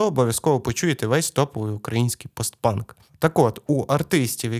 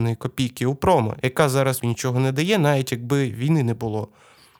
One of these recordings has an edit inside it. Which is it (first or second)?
second